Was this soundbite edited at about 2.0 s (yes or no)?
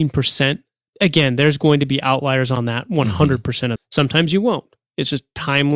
no